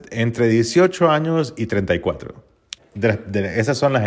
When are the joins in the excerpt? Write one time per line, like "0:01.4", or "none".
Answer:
0:02.8

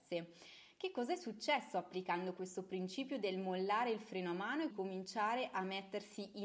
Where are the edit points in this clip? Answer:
0:04.7

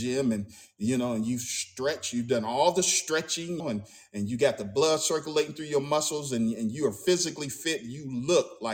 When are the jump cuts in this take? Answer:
0:03.6

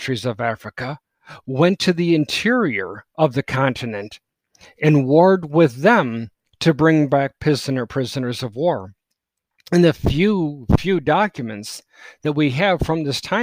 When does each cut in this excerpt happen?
none

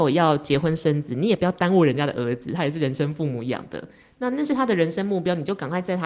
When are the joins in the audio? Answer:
none

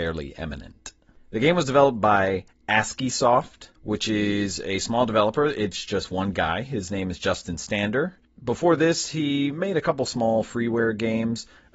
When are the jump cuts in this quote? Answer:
0:03.7

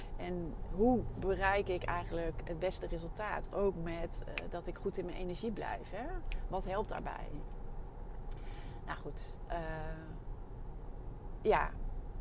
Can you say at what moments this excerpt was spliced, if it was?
0:09.5

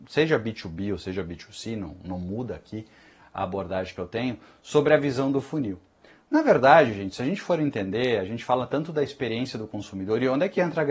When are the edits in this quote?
none

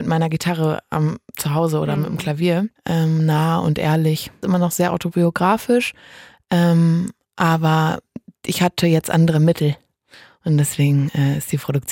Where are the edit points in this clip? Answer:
0:02.7

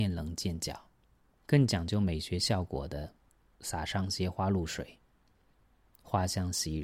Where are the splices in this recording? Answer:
0:01.4
0:03.5

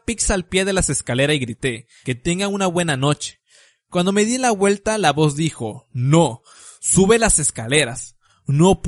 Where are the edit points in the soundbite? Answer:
0:02.0

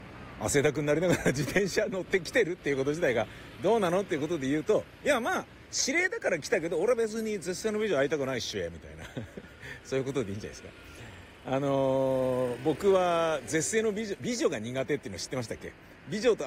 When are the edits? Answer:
none

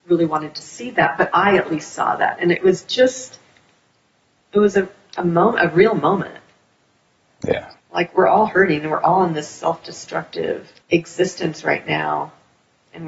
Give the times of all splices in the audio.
0:07.8
0:10.8

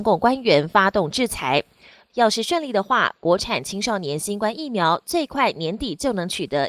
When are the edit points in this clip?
0:02.1

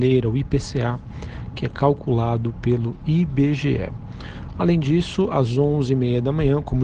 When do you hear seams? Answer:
none

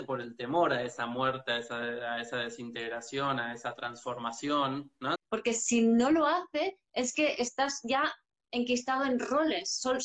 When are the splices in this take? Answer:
0:05.2

